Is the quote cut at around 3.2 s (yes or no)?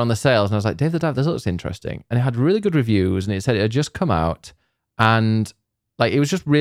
no